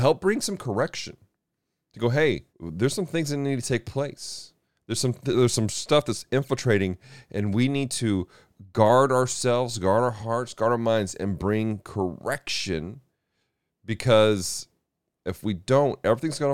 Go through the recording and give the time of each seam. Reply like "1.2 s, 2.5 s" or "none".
2.5 s